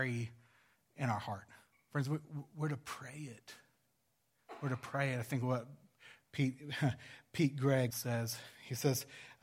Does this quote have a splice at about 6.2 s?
no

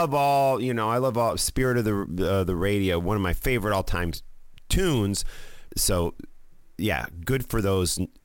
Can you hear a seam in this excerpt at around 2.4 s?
no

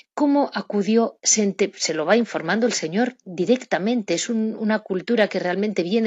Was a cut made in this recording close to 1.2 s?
no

